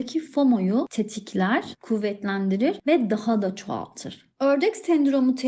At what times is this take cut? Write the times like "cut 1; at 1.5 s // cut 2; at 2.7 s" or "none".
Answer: cut 1; at 4.3 s